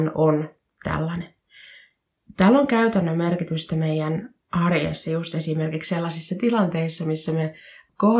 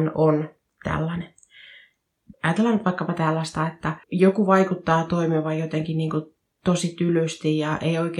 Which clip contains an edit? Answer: second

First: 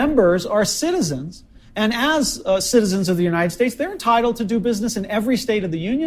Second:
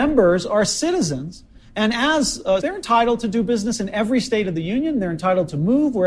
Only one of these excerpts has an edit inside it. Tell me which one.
second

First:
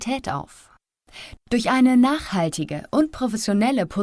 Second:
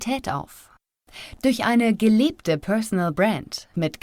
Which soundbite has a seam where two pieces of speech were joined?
first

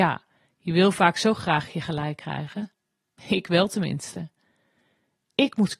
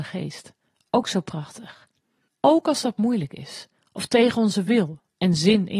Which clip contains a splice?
second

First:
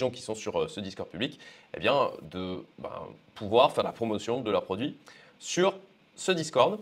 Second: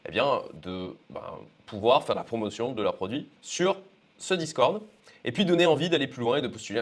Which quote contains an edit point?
second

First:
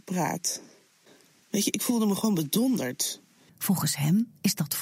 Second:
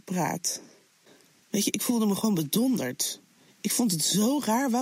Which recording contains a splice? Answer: first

